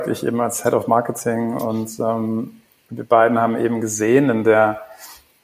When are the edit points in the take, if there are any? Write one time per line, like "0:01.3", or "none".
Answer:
none